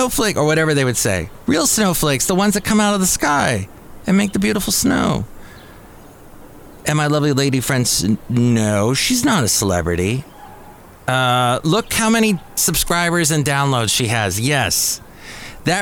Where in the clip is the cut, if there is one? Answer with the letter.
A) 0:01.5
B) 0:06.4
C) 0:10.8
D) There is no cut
A